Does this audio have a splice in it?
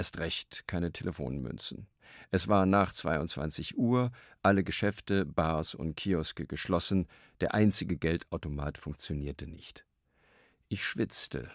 no; 0 cuts

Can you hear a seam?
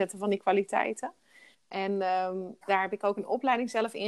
yes; 2 cuts; at 1.5 s, 2.6 s

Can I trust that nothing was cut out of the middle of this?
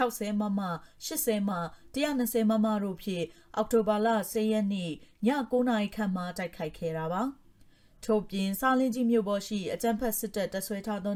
no; 1 cut; at 1.5 s

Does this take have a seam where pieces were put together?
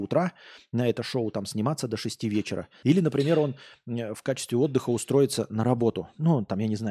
yes; 1 cut; at 2.8 s

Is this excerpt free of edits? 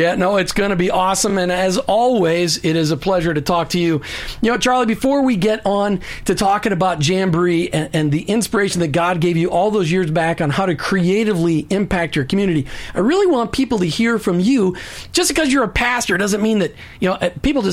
yes; 0 cuts

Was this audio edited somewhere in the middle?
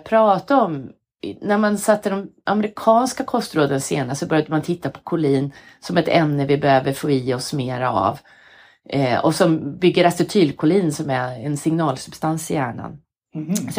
no; 0 cuts

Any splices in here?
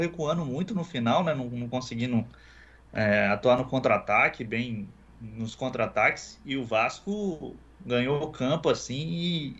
no; 0 cuts

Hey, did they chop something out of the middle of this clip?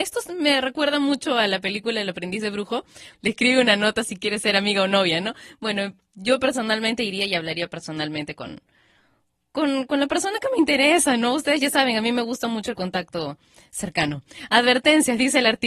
yes; 1 cut; at 3.1 s

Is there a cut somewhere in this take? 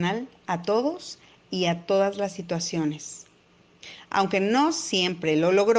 no; 0 cuts

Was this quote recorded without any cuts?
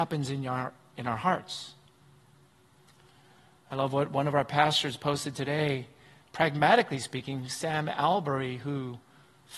yes; 0 cuts

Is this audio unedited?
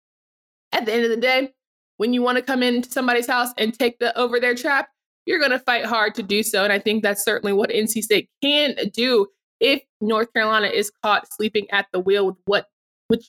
yes; 0 cuts

